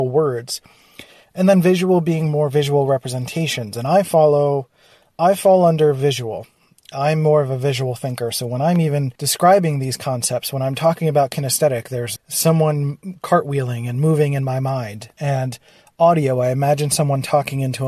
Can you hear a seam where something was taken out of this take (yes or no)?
yes